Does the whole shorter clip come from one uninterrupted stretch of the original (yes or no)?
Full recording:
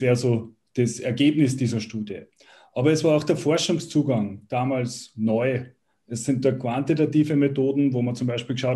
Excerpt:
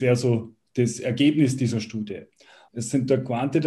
no